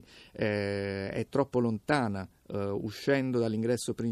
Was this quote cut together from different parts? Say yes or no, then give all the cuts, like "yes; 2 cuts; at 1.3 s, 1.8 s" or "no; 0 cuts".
no; 0 cuts